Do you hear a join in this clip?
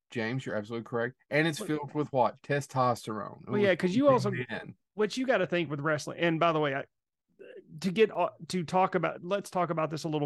no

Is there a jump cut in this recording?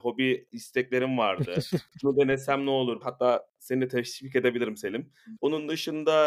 yes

